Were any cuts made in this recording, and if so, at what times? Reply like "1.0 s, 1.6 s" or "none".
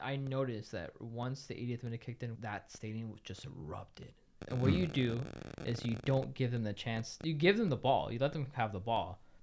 2.3 s, 4.4 s